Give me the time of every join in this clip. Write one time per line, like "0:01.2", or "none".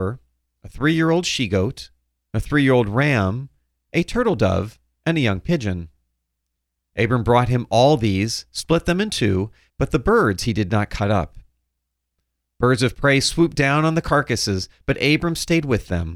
0:09.7